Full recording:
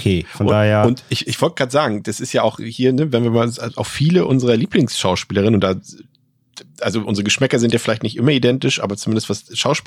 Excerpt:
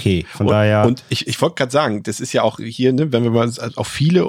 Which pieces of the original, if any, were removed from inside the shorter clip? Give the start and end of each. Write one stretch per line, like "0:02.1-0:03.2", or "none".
none

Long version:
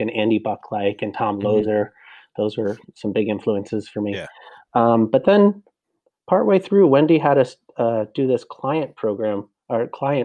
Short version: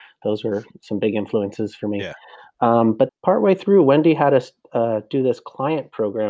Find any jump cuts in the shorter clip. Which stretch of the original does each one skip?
0:05.2-0:06.1

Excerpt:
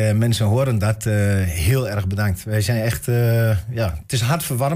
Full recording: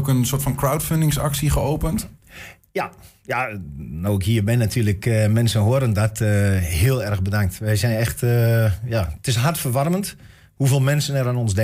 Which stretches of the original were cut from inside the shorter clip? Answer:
none

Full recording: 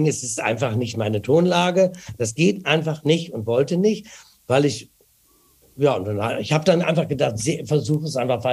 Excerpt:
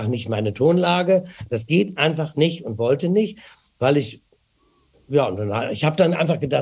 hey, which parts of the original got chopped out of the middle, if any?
none

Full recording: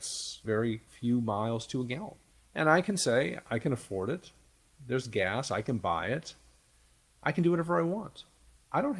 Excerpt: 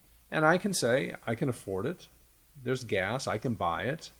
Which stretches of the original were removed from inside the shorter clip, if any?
none

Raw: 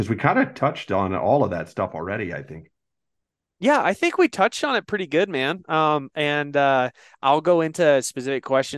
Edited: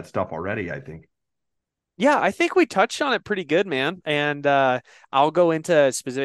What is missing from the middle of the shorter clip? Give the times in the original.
0:05.6-0:06.1

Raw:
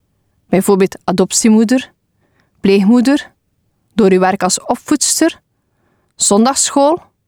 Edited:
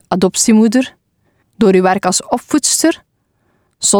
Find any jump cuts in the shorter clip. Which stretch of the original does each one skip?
0:02.4-0:03.8

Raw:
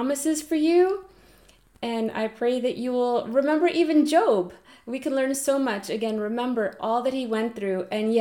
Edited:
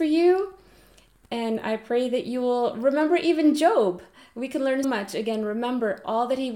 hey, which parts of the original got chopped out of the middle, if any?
0:05.3-0:05.6

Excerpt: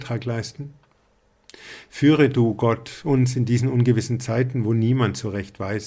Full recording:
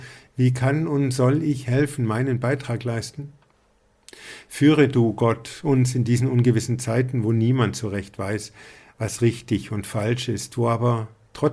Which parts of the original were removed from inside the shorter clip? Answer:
none

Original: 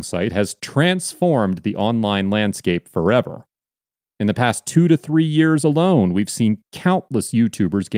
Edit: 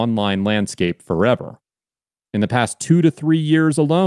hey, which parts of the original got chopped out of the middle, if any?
none

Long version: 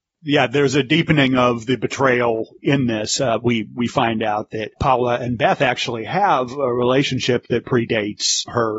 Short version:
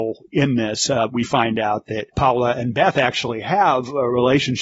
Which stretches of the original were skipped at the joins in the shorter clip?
0:03.4-0:03.7

